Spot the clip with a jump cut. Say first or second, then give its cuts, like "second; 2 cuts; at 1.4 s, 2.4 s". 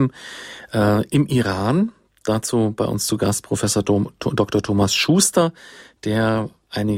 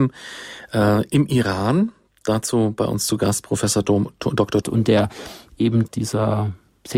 second; 2 cuts; at 4.6 s, 5.9 s